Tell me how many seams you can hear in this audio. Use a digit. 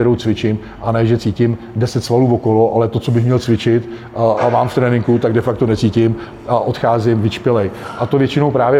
0